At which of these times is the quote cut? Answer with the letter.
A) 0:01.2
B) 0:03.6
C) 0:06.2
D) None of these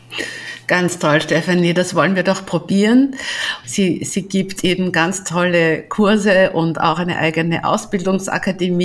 B